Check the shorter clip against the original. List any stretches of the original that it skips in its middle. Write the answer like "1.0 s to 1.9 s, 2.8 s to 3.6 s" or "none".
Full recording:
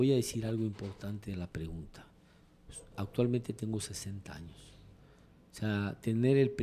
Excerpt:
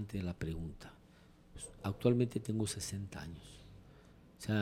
none